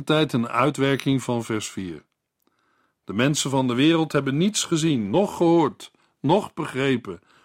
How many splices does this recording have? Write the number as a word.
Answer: zero